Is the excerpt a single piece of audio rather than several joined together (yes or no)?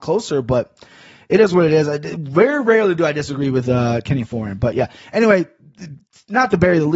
yes